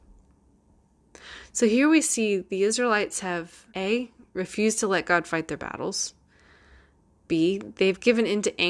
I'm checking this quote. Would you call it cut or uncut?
cut